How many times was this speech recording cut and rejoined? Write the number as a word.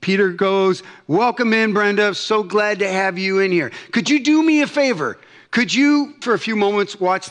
one